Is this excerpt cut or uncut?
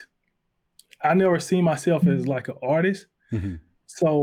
uncut